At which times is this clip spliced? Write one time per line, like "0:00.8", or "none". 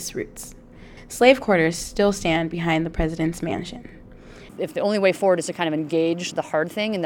0:04.5